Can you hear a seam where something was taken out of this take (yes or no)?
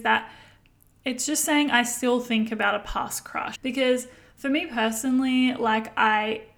yes